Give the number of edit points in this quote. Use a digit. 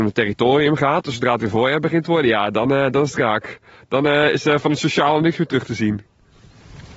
0